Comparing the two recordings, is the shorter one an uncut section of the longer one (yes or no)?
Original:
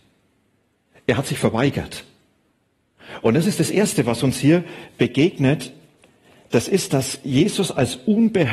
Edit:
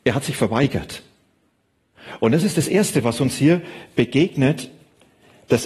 yes